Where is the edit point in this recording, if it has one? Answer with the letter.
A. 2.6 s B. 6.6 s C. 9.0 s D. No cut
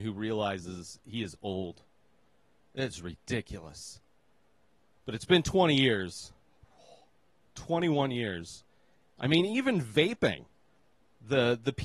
C